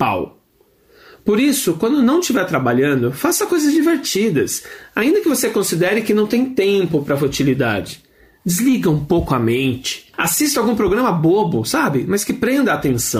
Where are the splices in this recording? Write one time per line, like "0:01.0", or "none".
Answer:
none